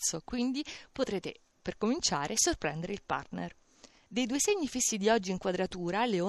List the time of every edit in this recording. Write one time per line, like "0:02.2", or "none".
0:04.1